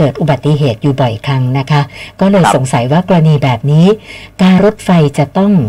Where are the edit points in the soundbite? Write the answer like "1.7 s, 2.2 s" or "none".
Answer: 4.6 s